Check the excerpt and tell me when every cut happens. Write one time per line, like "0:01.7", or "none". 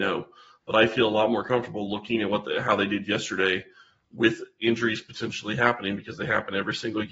none